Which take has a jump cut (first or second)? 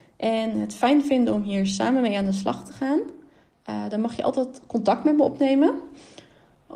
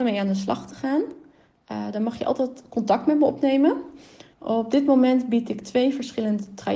second